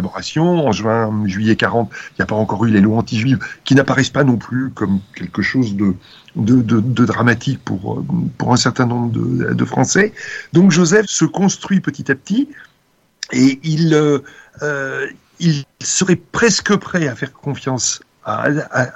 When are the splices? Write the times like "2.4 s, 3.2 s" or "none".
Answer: 11.0 s